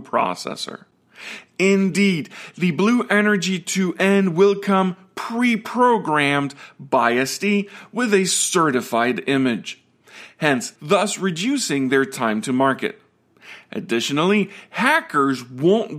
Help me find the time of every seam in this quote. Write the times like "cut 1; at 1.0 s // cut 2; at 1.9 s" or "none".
cut 1; at 10.8 s